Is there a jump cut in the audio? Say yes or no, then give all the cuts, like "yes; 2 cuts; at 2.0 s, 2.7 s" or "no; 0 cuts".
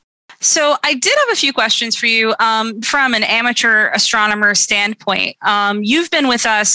yes; 1 cut; at 2.8 s